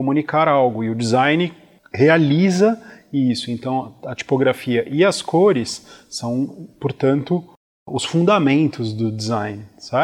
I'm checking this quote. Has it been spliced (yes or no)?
no